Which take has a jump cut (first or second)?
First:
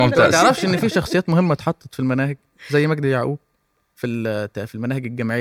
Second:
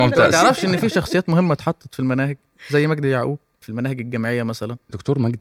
second